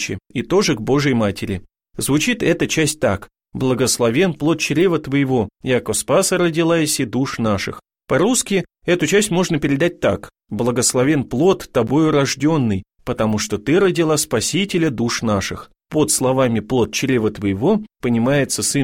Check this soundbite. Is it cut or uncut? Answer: cut